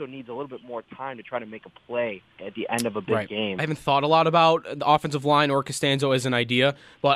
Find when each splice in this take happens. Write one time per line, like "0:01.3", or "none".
0:02.4
0:03.6